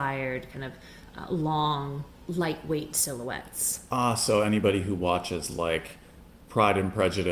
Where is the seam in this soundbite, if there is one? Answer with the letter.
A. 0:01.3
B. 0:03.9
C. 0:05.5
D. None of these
D